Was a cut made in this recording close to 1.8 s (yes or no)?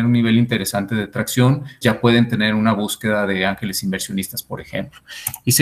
yes